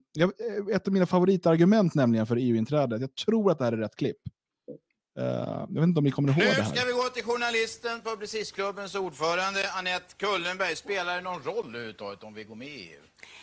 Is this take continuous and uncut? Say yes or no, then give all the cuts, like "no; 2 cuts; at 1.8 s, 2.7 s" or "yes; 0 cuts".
yes; 0 cuts